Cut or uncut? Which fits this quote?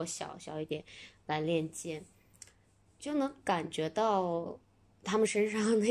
uncut